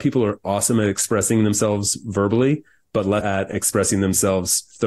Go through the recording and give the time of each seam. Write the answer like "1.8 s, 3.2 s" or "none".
3.2 s